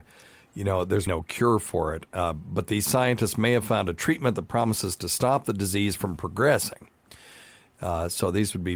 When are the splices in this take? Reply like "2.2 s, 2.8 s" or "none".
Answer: 1.1 s